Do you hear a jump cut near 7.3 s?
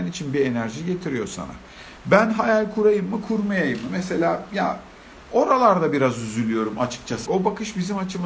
yes; 1 cut; at 7.3 s

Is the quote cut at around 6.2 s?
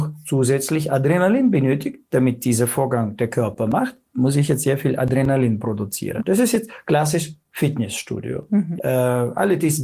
yes; 2 cuts; at 6.2 s, 8.8 s

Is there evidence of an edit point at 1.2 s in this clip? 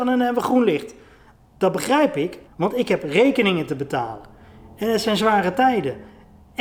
no; 1 cut; at 2.4 s

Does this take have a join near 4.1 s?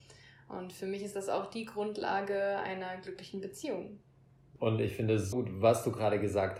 no; 1 cut; at 5.3 s

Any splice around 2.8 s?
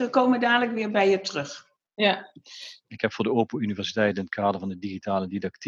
yes; 1 cut; at 2.8 s

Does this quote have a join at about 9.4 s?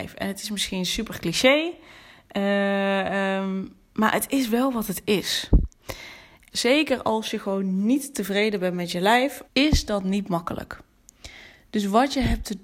yes; 2 cuts; at 6.5 s, 9.4 s

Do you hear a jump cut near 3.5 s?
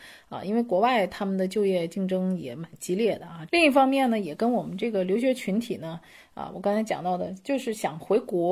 yes; 1 cut; at 3.5 s

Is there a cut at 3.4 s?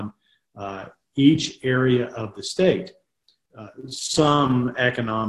yes; 1 cut; at 3.4 s

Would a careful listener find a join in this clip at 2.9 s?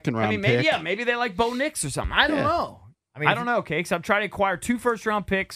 yes; 1 cut; at 2.9 s

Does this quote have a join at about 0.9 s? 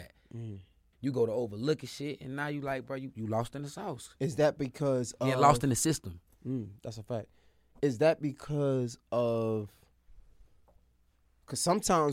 yes; 1 cut; at 0.9 s

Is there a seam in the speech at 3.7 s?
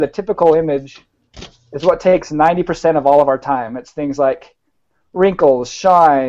no; 0 cuts

